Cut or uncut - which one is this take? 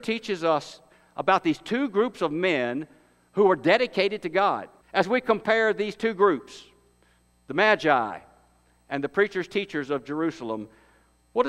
cut